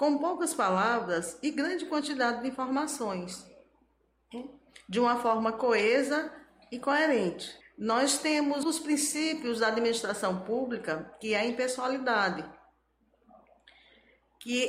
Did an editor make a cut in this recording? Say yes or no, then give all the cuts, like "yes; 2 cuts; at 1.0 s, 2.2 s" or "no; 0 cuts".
yes; 2 cuts; at 7.6 s, 8.6 s